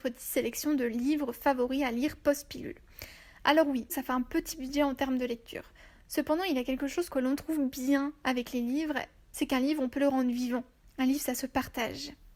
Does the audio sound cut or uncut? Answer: cut